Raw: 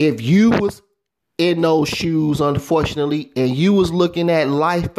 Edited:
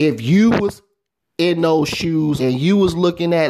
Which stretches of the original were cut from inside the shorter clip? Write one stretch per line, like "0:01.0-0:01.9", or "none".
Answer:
0:02.4-0:03.3